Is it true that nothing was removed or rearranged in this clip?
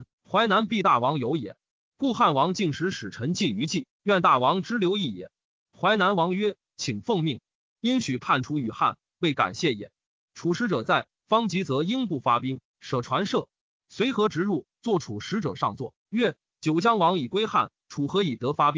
yes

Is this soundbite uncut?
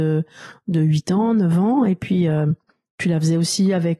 yes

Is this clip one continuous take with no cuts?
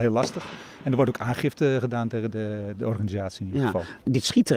yes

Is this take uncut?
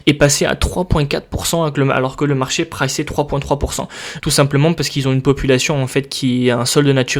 no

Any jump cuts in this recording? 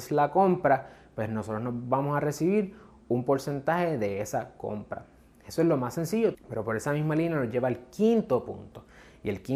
yes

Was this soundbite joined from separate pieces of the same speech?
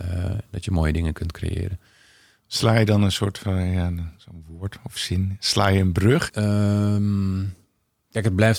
yes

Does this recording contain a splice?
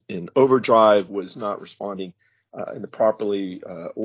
no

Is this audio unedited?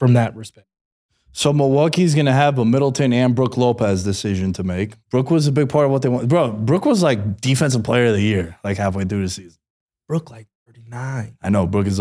no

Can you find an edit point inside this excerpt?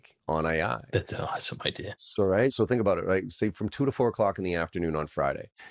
no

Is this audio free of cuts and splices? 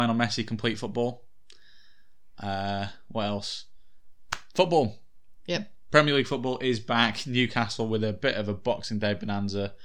yes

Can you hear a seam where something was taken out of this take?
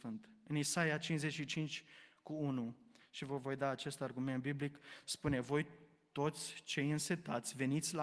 no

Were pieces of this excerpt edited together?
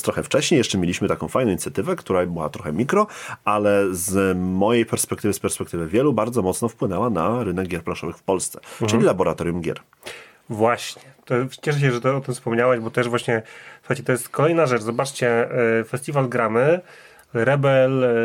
no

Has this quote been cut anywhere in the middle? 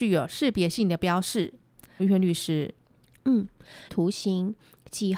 yes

